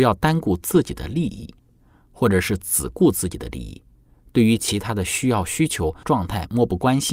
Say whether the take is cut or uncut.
cut